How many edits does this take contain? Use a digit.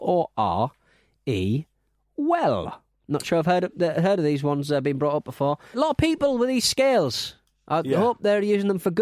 1